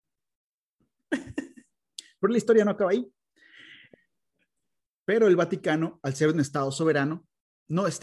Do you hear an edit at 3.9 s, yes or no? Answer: yes